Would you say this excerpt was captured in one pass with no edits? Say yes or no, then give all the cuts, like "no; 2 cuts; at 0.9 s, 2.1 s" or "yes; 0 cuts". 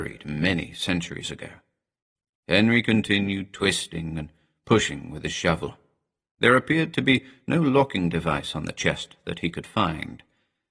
yes; 0 cuts